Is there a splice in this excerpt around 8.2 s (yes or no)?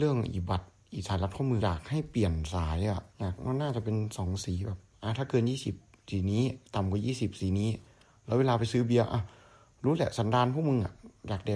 no